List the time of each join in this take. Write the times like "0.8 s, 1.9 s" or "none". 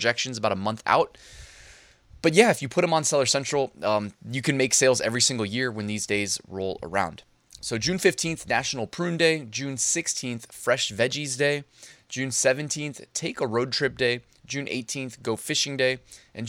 none